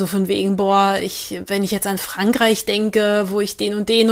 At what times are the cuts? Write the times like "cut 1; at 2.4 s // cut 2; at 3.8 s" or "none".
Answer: none